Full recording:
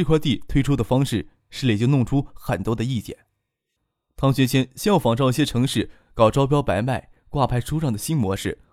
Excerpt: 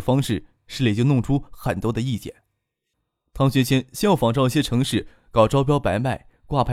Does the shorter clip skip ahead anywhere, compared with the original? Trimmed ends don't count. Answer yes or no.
no